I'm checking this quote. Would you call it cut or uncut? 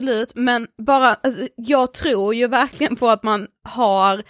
uncut